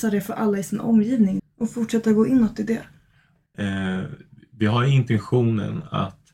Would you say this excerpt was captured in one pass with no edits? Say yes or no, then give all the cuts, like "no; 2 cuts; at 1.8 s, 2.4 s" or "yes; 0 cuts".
no; 2 cuts; at 1.4 s, 3.5 s